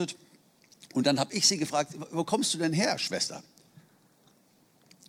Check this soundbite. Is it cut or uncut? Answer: uncut